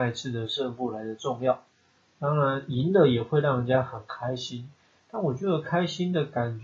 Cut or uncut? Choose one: uncut